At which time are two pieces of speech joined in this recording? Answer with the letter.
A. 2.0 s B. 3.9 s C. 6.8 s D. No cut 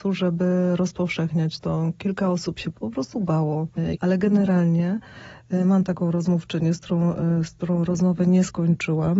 B